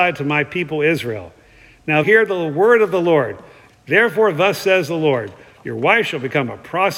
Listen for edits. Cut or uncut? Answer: cut